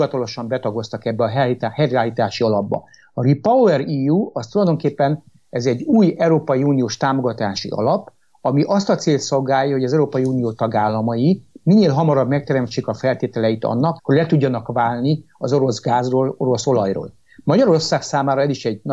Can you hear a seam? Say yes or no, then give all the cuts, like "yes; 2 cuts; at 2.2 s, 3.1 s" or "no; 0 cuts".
yes; 1 cut; at 14.0 s